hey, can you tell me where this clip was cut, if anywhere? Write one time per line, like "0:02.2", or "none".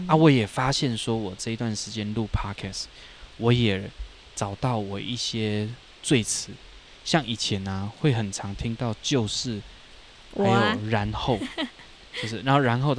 none